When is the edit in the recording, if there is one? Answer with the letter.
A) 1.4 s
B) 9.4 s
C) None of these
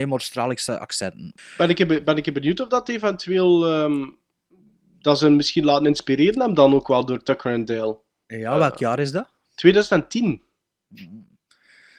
A